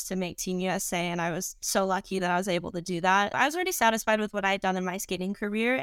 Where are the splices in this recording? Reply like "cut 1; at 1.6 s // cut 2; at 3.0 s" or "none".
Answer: cut 1; at 3.3 s